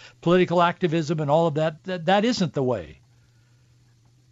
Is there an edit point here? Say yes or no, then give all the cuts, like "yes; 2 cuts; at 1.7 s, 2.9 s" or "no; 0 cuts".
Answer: no; 0 cuts